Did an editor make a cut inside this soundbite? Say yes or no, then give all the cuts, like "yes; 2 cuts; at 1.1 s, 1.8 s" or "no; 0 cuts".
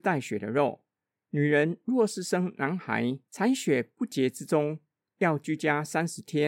no; 0 cuts